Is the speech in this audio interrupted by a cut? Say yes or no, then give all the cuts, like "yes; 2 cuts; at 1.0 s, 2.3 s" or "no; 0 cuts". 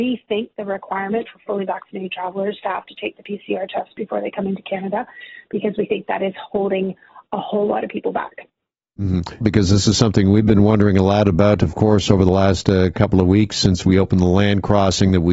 yes; 1 cut; at 9.4 s